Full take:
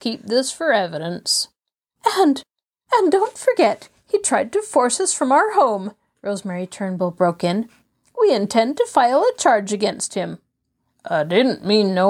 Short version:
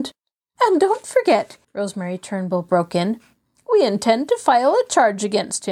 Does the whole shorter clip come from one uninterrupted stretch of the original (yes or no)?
no